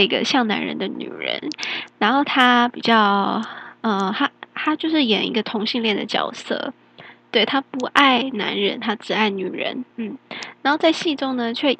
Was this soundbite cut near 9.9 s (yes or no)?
yes